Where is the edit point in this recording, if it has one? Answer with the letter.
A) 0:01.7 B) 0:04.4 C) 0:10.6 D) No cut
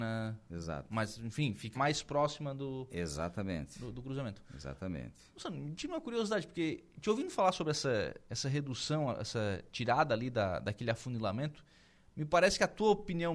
A